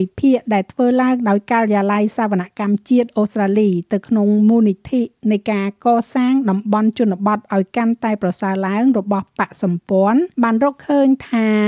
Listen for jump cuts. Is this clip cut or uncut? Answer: cut